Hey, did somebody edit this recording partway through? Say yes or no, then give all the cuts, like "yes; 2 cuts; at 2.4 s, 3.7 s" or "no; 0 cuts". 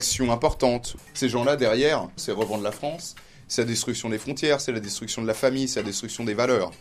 yes; 2 cuts; at 1.0 s, 2.2 s